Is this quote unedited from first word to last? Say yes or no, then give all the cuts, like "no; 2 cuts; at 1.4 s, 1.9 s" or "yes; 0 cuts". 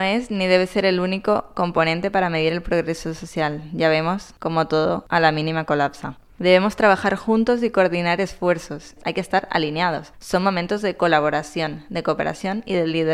no; 1 cut; at 9.0 s